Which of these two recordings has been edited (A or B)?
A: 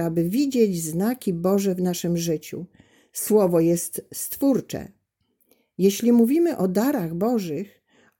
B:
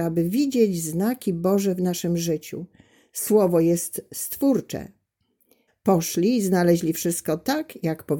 B